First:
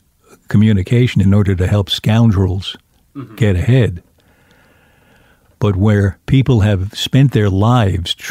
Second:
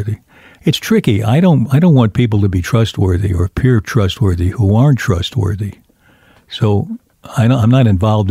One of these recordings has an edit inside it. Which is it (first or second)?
first